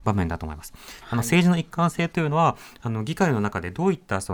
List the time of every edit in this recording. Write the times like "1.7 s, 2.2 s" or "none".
1.0 s